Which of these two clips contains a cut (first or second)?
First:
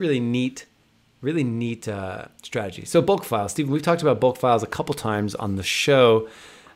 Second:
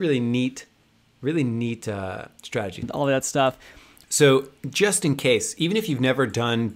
second